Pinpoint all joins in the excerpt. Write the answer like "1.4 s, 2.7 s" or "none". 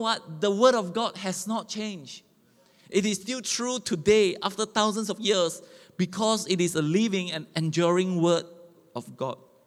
none